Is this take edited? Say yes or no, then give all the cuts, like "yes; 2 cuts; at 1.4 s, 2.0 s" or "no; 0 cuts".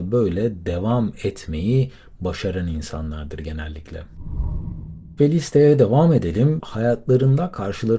yes; 1 cut; at 6.6 s